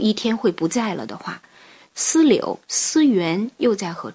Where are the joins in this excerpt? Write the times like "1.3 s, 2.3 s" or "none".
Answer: 1.8 s